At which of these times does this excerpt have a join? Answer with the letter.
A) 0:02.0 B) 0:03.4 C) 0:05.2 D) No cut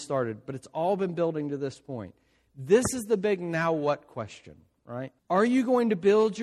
C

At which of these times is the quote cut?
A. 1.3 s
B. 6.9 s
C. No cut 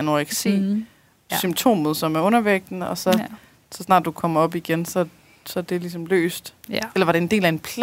A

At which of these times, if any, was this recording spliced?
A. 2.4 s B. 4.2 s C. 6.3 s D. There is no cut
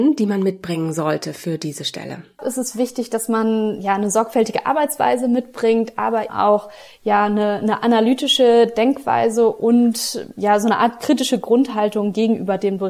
C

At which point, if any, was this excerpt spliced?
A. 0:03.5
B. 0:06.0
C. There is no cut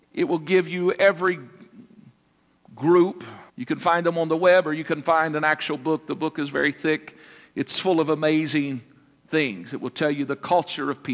A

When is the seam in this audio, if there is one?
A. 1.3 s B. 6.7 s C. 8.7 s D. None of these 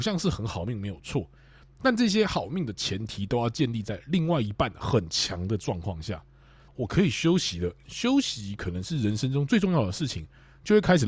B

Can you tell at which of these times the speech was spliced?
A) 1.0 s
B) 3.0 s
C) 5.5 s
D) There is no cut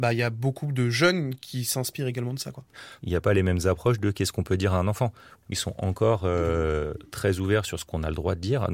C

